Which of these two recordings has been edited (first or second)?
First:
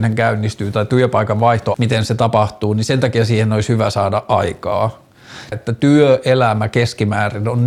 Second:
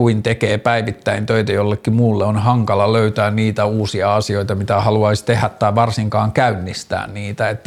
first